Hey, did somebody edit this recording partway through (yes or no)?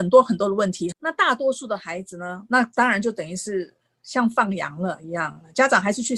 yes